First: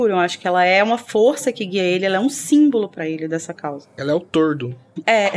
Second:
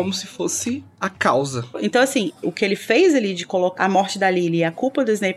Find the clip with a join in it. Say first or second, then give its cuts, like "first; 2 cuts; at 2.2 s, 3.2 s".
second; 2 cuts; at 1.7 s, 3.8 s